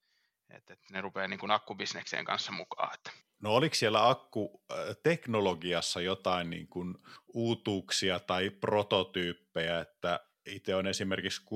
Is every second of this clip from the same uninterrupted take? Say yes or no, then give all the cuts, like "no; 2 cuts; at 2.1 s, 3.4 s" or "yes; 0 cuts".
yes; 0 cuts